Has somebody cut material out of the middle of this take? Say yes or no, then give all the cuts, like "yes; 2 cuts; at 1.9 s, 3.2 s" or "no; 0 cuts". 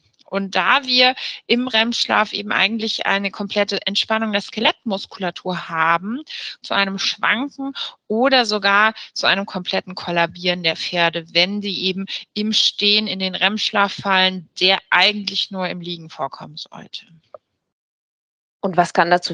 yes; 1 cut; at 6.6 s